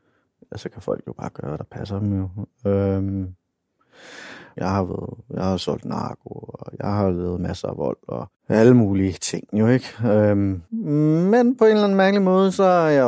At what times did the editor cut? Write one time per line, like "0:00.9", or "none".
0:04.6
0:10.7